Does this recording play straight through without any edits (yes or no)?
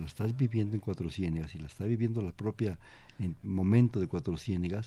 yes